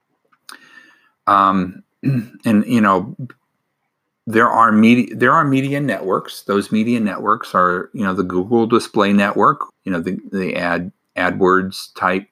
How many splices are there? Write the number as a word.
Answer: one